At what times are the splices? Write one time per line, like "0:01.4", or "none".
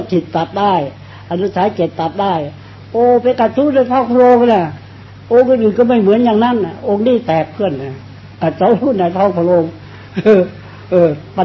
none

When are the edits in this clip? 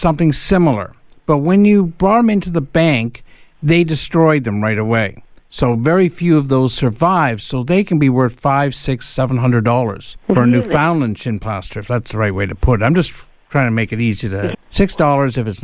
0:10.2
0:14.5

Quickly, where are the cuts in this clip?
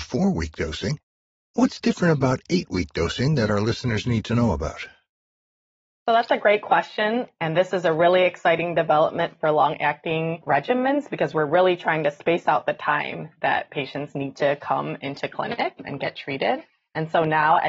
none

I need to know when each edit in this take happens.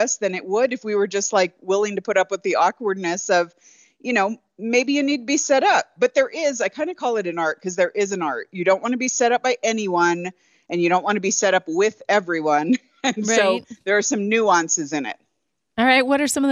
none

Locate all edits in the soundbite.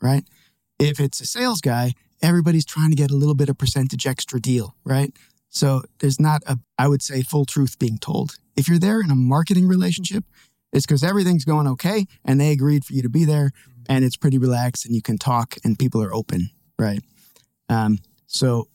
0:06.6

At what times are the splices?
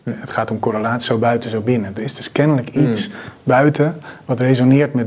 none

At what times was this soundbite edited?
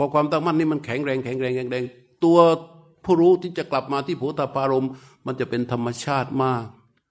none

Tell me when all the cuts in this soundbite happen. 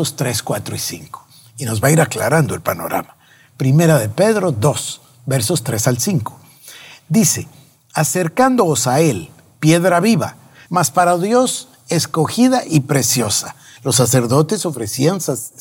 0:10.7
0:13.8

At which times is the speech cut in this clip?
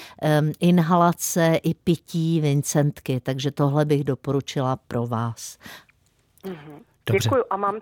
none

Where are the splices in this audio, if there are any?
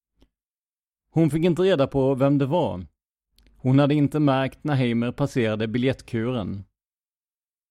none

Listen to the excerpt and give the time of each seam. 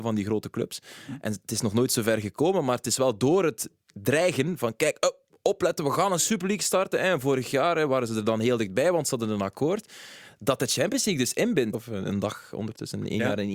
0:11.7

